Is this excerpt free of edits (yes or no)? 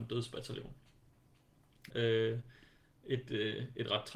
no